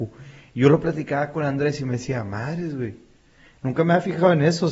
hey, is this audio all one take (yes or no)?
yes